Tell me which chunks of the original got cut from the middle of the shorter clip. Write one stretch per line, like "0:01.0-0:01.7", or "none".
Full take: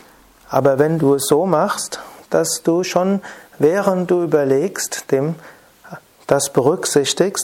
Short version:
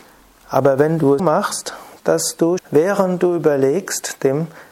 0:01.2-0:01.5
0:02.8-0:03.5